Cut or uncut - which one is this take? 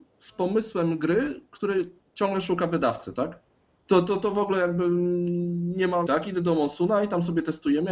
cut